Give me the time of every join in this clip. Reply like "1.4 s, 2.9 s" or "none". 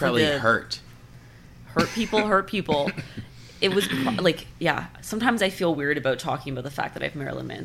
none